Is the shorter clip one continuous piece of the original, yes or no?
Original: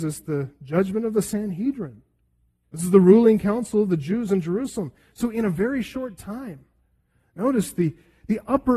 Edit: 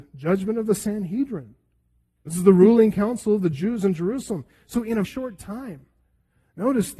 no